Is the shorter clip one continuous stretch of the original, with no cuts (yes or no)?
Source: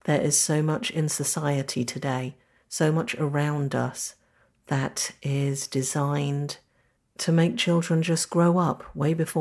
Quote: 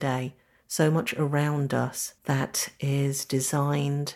no